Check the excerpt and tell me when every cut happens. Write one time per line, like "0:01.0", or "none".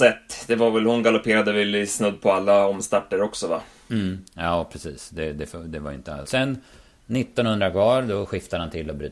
0:06.2